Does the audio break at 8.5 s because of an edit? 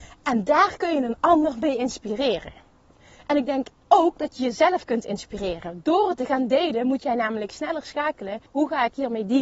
yes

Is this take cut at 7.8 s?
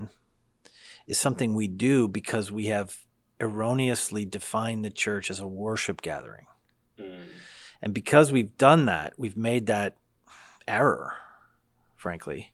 no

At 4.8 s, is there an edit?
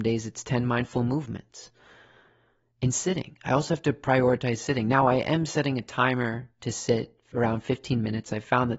no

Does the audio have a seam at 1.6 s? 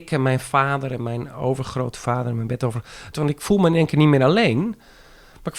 no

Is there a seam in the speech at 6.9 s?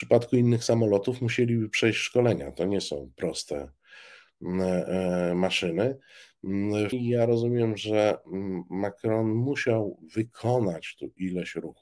yes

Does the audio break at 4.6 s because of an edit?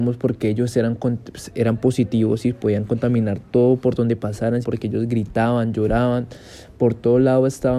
yes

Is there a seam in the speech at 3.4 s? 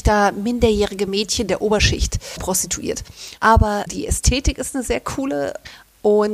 yes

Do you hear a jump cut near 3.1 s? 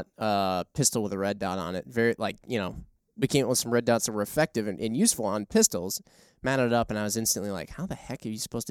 no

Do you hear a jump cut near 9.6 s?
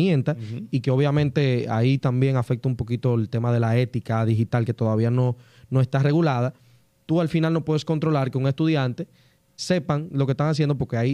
yes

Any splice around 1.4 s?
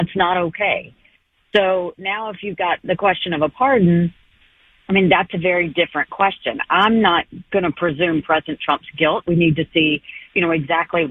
no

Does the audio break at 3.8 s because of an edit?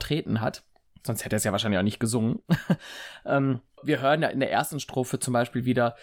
yes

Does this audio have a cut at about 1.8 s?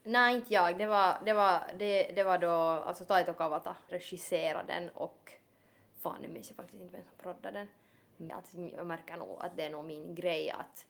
no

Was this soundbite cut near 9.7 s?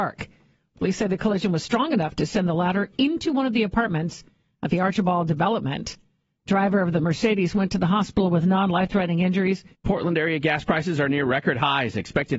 yes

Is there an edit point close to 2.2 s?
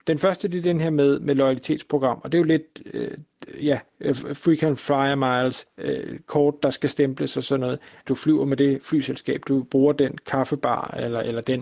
no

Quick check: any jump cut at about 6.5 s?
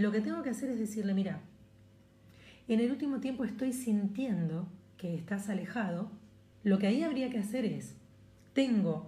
yes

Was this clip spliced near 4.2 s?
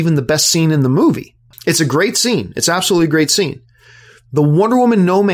no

